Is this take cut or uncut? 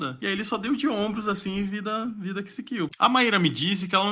cut